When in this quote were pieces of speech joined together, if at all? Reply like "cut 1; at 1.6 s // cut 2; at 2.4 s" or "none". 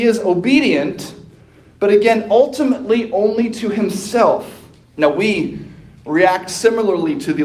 cut 1; at 4.8 s